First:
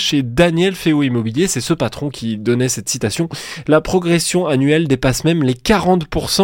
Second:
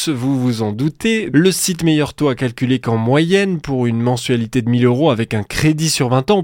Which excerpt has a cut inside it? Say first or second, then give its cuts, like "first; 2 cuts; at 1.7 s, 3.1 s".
second; 1 cut; at 1.3 s